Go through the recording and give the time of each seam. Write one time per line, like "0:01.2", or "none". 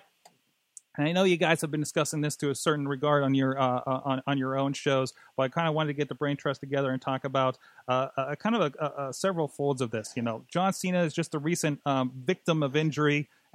none